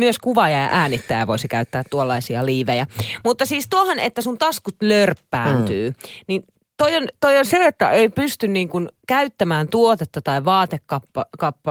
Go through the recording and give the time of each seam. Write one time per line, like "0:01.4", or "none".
none